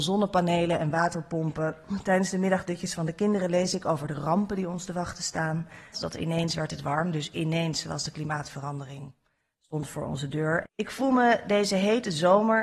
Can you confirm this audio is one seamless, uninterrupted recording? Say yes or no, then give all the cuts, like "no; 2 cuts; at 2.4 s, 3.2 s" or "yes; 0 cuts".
no; 2 cuts; at 5.9 s, 10.6 s